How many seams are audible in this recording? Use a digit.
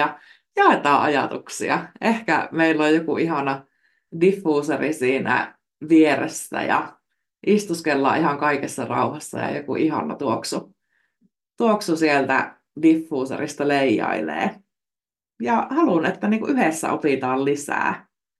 0